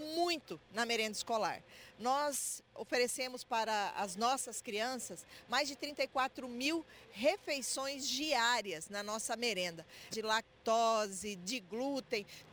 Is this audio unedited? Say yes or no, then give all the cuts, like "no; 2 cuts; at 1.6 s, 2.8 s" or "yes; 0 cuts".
no; 1 cut; at 10.1 s